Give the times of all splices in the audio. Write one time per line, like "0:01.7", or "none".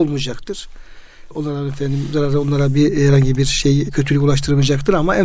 none